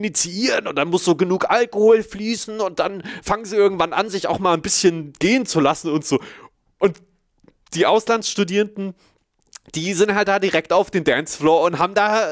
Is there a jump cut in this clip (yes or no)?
no